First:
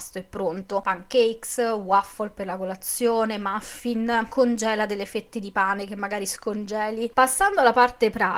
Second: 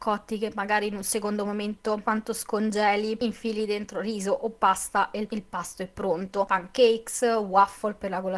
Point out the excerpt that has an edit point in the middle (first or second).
first